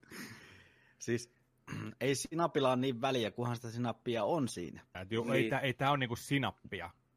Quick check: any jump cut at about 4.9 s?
yes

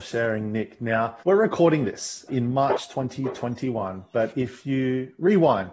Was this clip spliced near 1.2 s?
yes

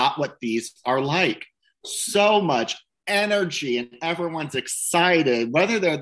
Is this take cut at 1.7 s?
no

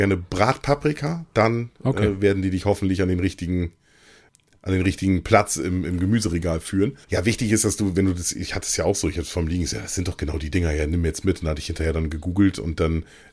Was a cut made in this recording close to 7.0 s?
yes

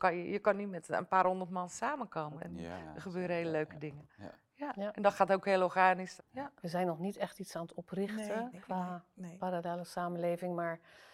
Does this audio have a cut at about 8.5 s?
yes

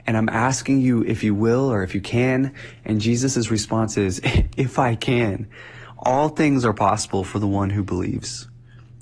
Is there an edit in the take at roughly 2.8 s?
no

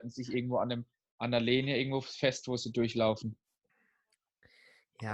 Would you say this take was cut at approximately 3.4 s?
no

